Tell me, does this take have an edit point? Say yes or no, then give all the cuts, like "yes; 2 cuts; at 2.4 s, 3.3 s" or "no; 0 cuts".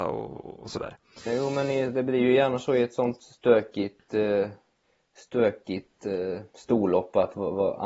no; 0 cuts